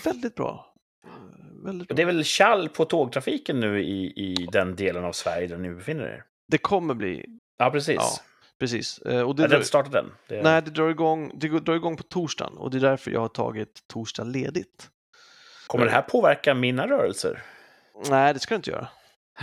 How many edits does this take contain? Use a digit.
2